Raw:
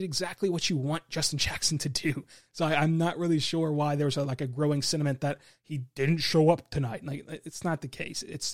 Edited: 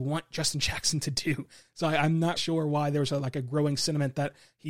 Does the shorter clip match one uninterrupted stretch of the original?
no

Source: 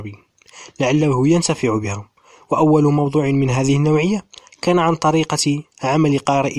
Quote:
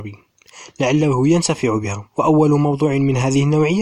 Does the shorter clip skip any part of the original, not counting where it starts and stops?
yes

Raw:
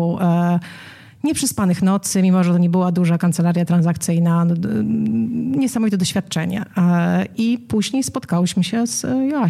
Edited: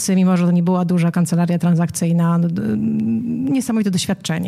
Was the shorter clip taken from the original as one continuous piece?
yes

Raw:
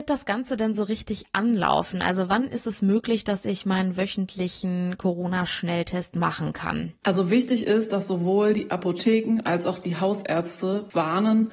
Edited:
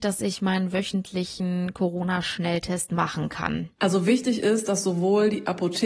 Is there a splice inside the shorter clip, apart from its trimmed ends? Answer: no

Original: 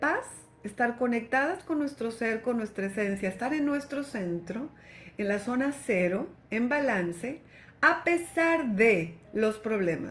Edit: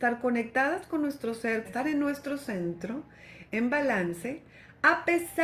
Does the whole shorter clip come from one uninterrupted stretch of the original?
no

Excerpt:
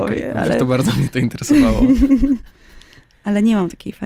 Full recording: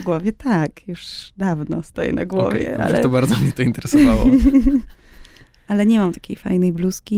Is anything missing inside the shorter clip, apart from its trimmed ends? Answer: no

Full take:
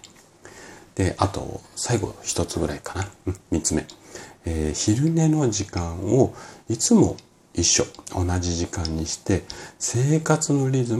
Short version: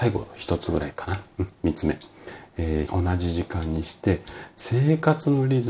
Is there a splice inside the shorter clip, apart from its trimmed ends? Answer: yes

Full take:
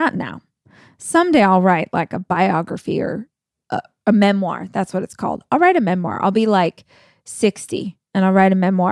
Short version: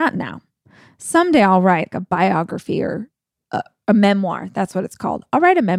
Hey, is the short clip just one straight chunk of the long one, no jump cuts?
no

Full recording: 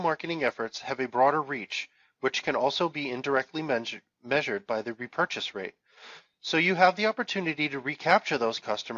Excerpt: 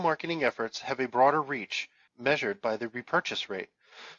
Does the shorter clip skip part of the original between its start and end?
yes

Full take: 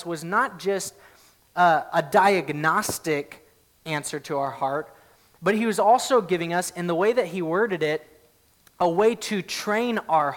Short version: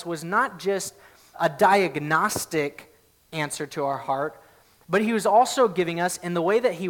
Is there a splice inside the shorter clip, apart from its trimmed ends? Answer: yes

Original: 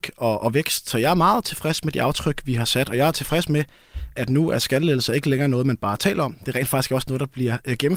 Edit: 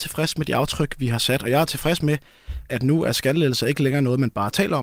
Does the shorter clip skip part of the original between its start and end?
no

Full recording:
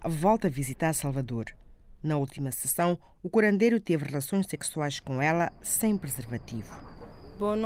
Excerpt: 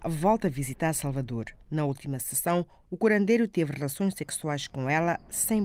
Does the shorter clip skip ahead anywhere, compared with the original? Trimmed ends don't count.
yes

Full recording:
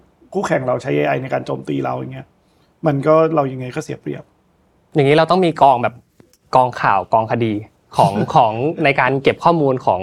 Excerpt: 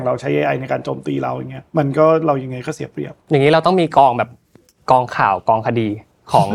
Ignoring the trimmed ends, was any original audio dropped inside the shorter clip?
yes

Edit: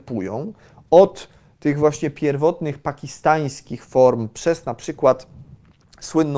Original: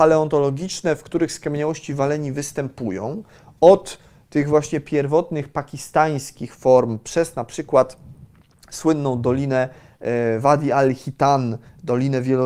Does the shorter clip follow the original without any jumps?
yes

